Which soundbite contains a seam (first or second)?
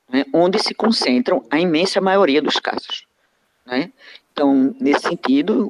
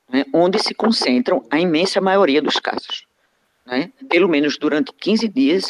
second